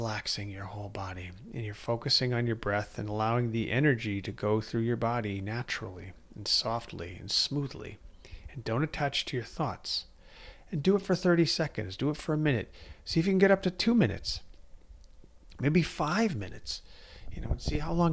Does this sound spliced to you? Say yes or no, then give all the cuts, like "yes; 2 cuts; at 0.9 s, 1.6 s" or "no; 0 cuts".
no; 0 cuts